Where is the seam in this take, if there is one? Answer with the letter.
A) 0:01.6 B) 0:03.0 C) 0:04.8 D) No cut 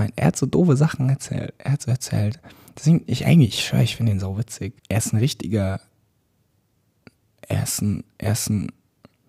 C